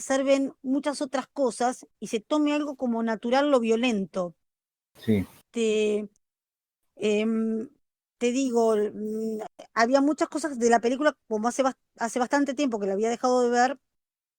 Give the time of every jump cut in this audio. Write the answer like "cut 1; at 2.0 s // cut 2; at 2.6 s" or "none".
none